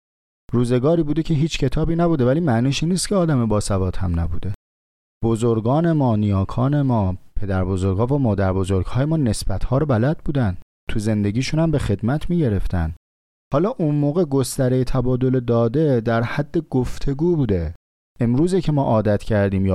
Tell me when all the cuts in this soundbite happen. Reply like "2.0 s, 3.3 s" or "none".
none